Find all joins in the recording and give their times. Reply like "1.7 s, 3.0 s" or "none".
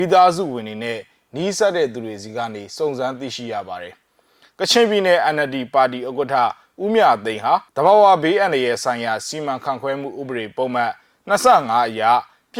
7.7 s